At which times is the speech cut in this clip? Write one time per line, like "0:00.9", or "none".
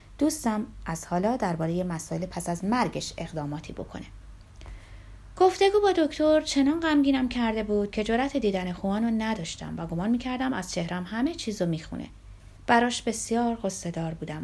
0:12.6

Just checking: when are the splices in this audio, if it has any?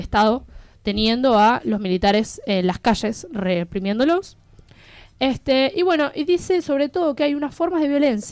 none

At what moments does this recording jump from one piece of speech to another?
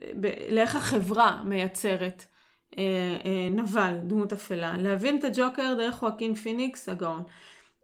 none

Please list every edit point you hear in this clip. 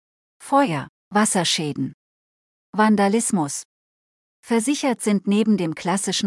0:01.0

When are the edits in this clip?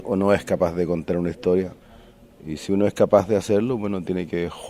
none

